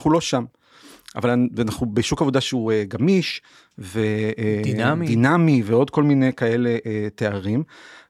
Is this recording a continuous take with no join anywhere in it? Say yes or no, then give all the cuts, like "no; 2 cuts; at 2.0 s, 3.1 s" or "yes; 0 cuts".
yes; 0 cuts